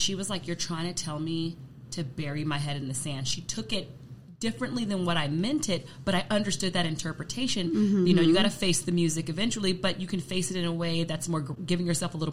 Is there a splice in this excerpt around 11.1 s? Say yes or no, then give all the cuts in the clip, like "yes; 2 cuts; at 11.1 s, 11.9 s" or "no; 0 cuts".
no; 1 cut; at 8.0 s